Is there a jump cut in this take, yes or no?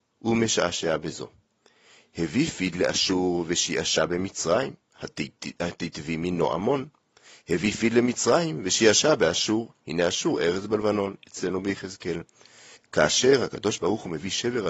yes